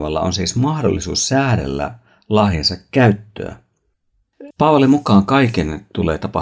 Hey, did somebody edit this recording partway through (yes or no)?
yes